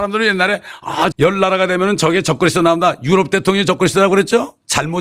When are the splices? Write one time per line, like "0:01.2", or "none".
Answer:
0:01.1